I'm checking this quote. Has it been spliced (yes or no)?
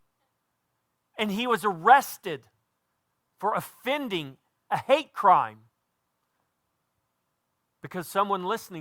no